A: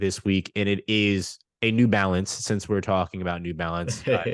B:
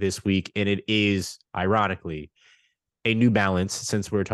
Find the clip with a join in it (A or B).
A